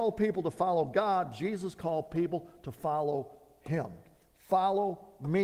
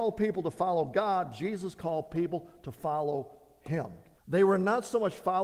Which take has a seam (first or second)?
second